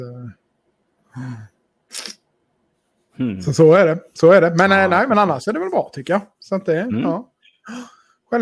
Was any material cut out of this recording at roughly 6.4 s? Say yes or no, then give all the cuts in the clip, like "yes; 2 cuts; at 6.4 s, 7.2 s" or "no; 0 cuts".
no; 0 cuts